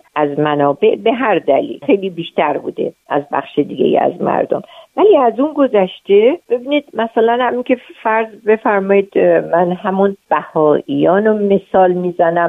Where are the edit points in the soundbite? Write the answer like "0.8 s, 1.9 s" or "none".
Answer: 1.8 s